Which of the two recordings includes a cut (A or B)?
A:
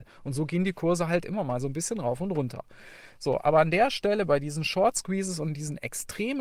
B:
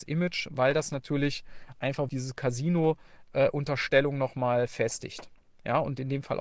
B